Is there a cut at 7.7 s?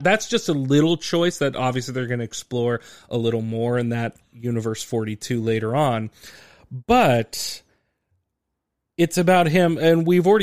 no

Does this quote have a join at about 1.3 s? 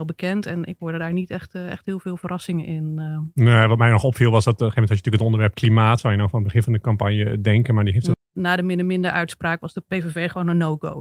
no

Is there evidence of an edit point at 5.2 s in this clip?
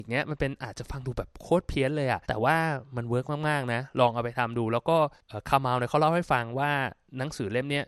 no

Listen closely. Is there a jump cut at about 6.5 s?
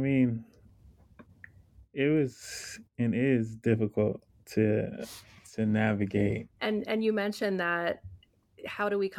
yes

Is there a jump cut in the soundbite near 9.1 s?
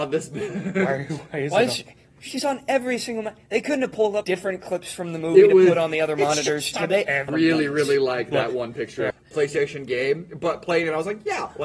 yes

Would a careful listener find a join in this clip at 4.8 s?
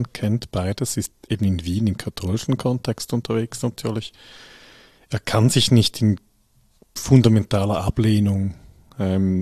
no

